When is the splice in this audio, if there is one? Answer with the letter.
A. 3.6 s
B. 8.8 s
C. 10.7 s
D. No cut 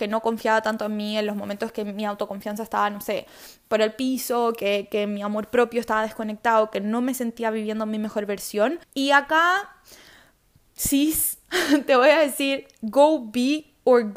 B